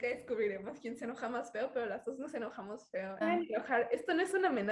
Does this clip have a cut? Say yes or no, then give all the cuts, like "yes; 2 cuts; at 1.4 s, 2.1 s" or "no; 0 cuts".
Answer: yes; 1 cut; at 3.2 s